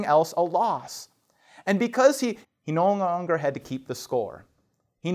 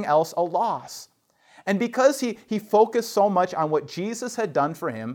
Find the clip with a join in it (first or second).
first